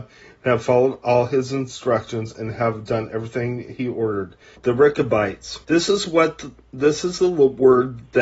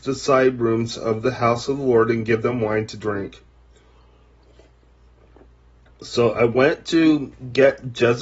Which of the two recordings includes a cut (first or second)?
first